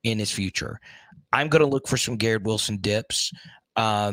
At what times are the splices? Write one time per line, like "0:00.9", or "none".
none